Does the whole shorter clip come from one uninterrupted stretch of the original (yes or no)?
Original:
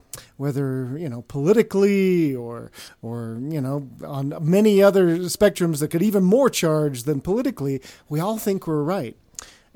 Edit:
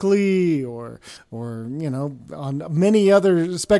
yes